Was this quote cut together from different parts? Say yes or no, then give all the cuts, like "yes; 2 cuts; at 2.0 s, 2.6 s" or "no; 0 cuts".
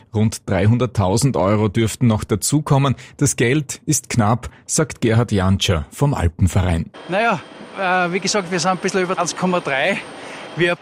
no; 0 cuts